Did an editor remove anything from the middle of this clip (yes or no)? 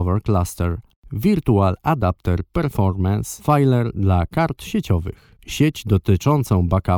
no